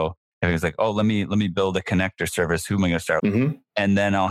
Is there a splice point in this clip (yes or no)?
yes